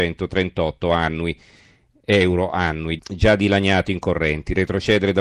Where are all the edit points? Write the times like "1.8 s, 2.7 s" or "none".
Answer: 3.0 s